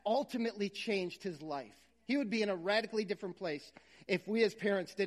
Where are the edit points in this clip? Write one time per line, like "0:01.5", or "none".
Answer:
none